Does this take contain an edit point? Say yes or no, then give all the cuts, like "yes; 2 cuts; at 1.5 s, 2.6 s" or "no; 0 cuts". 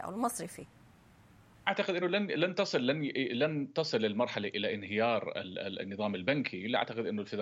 no; 0 cuts